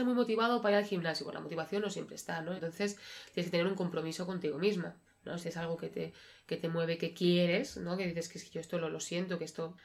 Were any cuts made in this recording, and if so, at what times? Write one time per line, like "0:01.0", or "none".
0:02.6
0:05.4